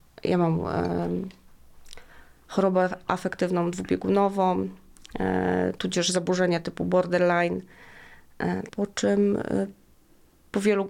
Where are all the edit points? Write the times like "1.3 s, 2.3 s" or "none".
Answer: 8.7 s